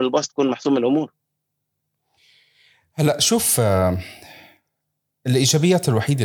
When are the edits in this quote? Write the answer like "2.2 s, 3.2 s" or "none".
none